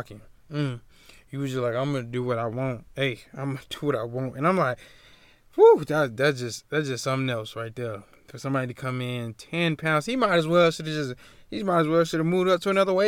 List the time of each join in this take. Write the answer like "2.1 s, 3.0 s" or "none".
none

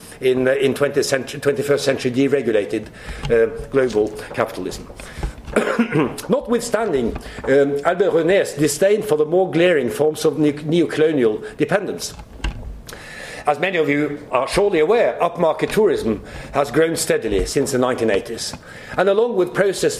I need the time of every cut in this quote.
none

